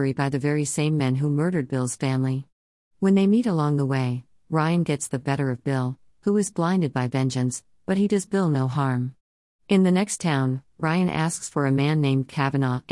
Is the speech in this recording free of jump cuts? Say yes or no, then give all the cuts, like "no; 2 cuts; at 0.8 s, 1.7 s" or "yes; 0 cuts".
yes; 0 cuts